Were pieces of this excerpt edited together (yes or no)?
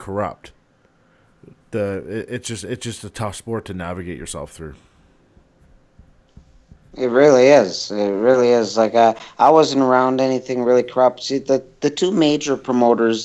no